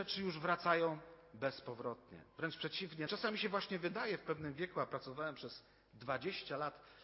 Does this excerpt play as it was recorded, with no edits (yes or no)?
no